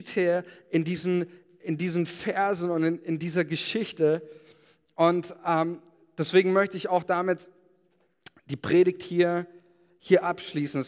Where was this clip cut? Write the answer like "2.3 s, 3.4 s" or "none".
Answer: none